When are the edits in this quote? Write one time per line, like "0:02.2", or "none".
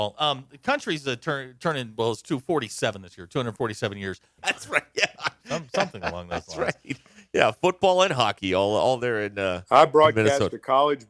0:04.4

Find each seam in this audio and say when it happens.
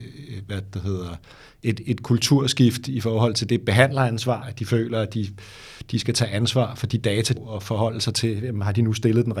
0:04.4
0:07.4

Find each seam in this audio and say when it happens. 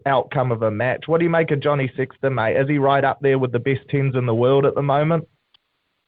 none

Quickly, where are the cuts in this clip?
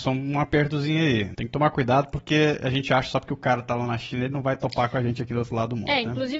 0:01.3

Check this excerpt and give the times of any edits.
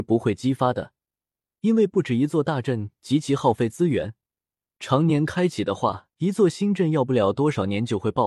0:04.7
0:06.1

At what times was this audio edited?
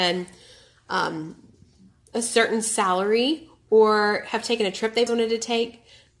0:05.1

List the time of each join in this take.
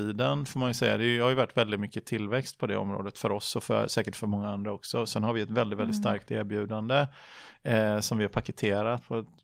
none

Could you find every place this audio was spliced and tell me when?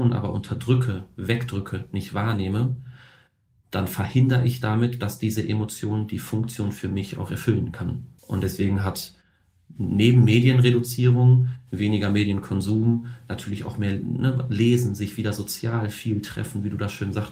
0:08.2

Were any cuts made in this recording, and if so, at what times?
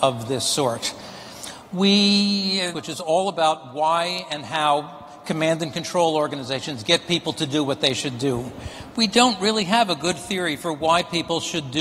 0:02.7

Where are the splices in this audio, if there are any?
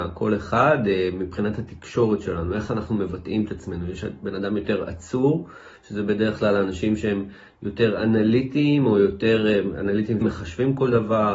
0:10.2

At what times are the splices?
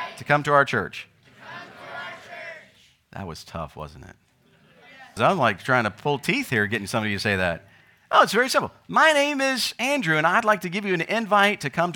0:05.2

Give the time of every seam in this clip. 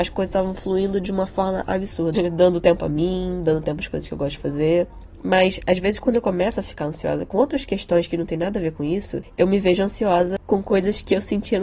0:02.1

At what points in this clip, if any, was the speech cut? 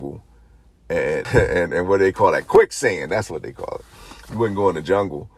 0:01.2

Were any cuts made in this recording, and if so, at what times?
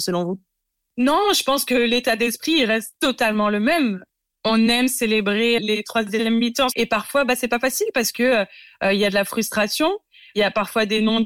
0:05.6
0:06.7

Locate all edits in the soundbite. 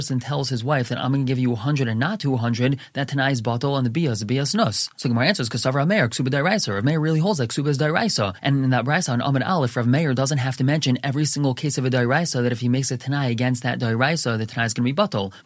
none

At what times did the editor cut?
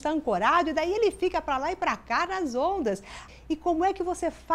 0:03.3

